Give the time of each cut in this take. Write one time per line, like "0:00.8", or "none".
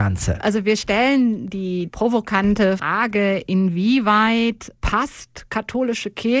0:02.8